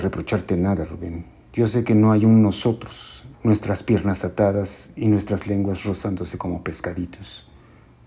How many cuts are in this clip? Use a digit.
1